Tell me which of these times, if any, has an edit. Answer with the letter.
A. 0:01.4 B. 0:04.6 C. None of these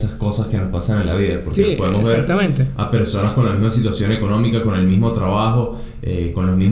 C